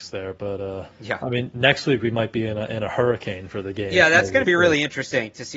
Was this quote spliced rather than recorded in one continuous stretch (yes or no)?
yes